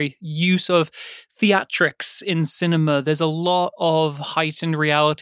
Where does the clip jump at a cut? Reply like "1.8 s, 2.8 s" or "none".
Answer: none